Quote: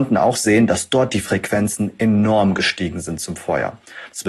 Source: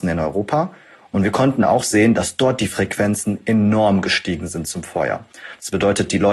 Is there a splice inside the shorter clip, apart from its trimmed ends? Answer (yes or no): no